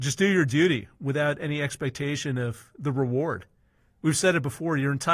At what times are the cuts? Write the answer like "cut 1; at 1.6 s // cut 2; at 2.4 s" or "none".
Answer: none

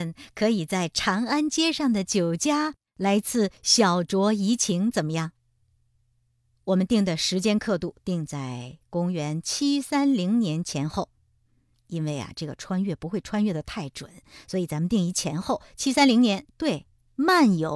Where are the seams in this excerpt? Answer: cut 1; at 16.5 s

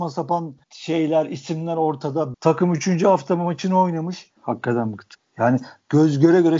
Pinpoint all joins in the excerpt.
cut 1; at 2.3 s // cut 2; at 4.4 s

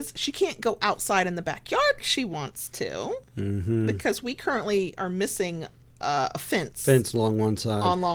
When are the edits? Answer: cut 1; at 2.0 s

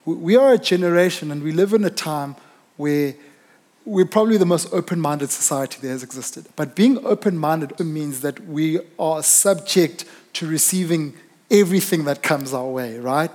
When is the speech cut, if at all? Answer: cut 1; at 6.5 s // cut 2; at 7.8 s

